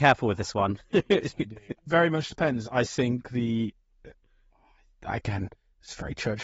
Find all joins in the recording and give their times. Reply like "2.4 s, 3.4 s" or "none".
1.8 s